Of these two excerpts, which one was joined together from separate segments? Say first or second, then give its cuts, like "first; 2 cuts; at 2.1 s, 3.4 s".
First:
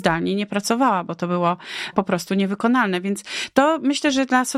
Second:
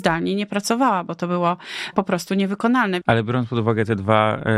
second; 1 cut; at 3.0 s